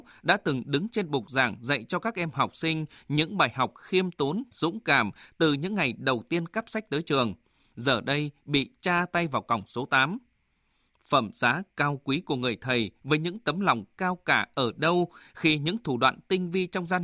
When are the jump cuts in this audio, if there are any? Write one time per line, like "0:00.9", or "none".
0:04.5